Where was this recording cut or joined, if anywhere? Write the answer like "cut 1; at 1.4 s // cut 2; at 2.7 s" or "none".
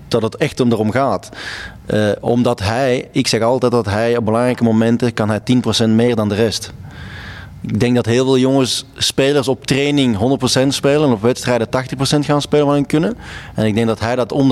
none